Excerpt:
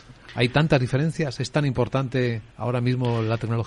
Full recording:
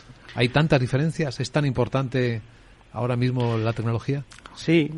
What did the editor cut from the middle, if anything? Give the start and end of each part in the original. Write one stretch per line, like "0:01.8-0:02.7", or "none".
0:02.5-0:02.9